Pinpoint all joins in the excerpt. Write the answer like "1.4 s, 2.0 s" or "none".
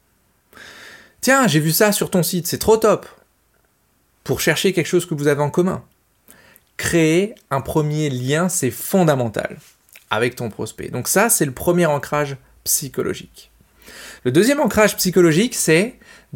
none

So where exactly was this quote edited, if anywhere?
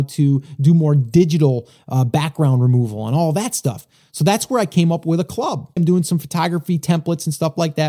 5.8 s

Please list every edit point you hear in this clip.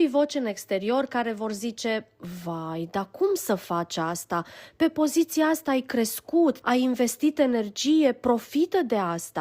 6.6 s

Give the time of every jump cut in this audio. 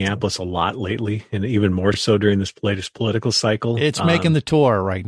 none

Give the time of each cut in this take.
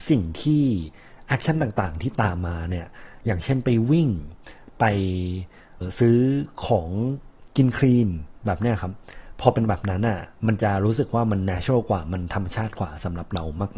5.8 s

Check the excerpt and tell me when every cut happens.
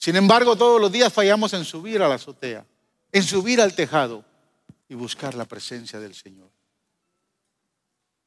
2.9 s, 4.8 s

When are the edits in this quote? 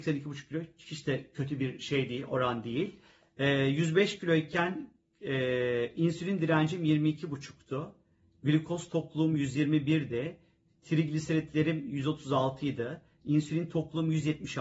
none

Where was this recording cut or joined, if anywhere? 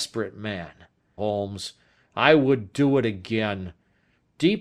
1.2 s

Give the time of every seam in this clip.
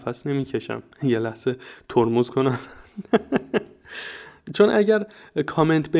0.9 s

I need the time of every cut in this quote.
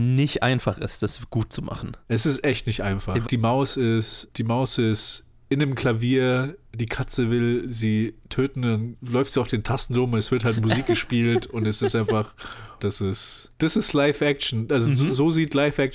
3.2 s, 10.5 s, 12.8 s

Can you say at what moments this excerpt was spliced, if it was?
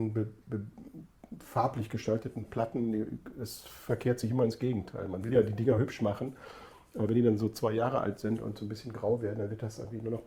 none

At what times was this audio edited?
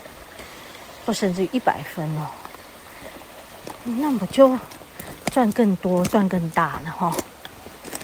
none

